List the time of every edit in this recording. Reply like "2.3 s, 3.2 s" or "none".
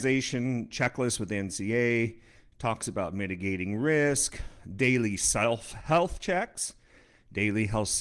none